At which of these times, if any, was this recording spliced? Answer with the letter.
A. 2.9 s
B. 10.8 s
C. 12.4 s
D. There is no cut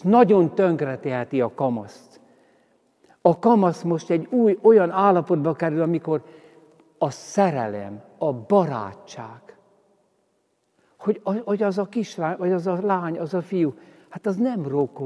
D